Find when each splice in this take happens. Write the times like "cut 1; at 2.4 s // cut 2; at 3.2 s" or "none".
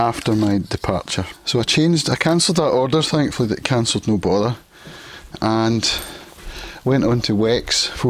cut 1; at 1.3 s